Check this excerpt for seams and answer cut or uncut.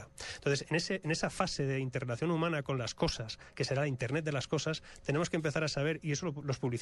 uncut